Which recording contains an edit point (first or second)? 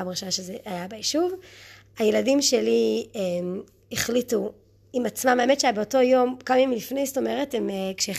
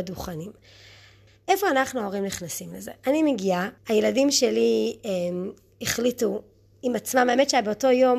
second